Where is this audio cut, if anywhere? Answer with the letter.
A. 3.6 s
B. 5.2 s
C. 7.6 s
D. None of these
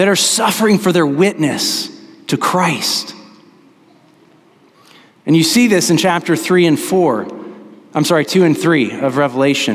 D